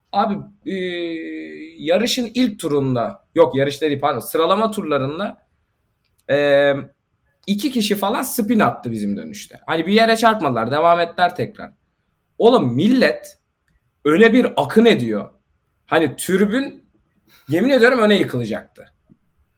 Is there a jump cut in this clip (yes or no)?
no